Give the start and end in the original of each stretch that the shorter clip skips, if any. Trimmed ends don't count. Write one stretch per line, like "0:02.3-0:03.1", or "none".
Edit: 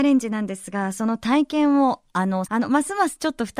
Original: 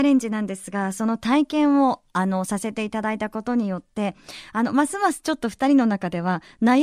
0:02.5-0:04.5